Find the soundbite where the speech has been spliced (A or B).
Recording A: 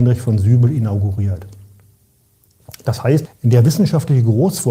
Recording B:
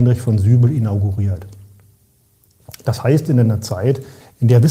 A